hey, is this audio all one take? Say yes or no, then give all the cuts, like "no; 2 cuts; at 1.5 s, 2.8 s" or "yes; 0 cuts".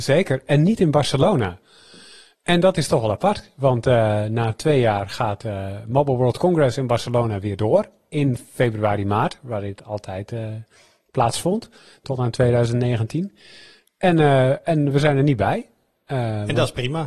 yes; 0 cuts